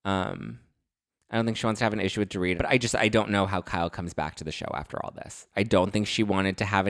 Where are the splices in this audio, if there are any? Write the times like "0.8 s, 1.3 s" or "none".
2.6 s, 5.5 s

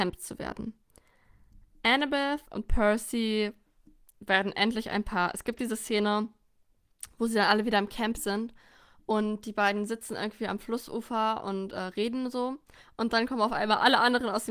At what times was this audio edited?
none

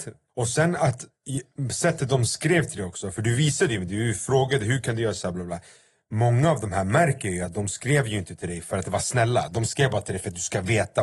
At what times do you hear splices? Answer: 5.3 s

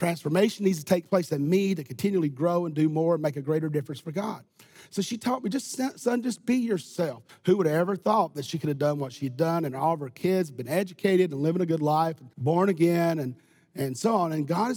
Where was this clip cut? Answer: 7.3 s, 12.3 s

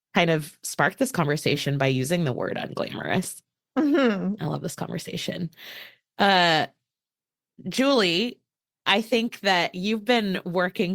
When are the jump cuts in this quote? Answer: 4.4 s

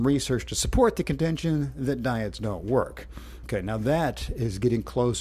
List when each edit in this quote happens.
3.4 s

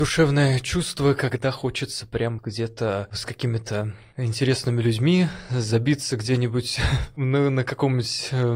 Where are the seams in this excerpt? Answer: 2.4 s

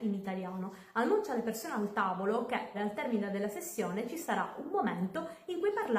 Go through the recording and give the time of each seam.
2.7 s

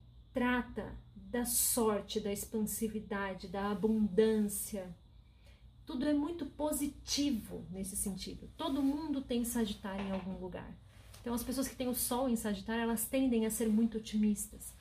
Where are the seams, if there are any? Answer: none

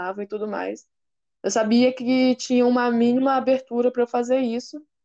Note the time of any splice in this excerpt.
none

